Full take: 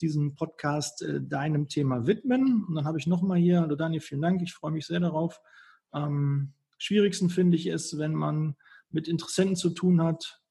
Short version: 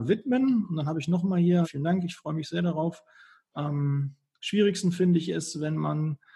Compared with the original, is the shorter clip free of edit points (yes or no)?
no